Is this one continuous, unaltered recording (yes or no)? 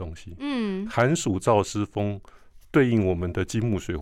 no